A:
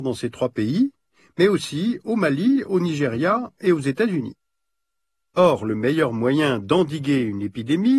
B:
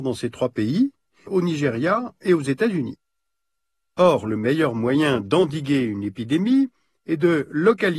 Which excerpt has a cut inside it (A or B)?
B